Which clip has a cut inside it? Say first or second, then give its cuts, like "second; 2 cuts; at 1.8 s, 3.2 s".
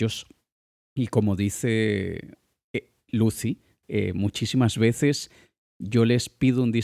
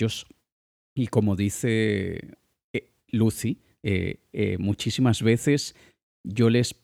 first; 1 cut; at 3.8 s